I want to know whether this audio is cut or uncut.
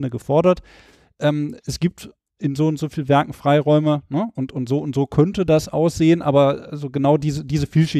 uncut